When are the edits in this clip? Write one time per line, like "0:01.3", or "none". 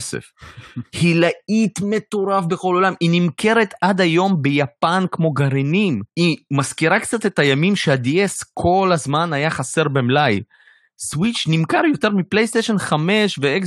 0:06.1